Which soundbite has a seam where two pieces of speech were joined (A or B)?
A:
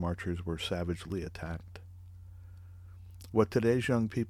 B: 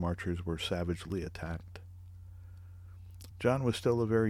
B